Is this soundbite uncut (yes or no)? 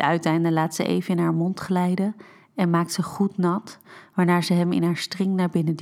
yes